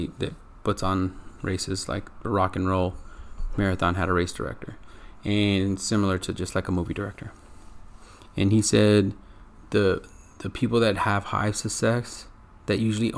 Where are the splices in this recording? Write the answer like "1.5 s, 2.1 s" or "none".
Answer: none